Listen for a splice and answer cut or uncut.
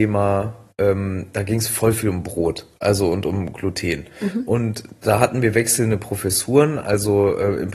uncut